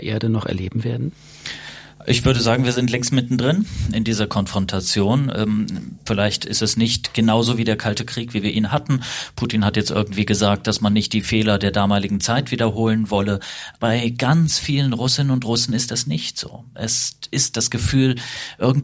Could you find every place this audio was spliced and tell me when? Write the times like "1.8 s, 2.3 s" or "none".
13.8 s